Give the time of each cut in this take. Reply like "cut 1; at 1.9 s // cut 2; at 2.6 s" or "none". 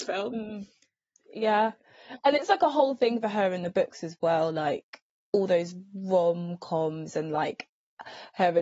none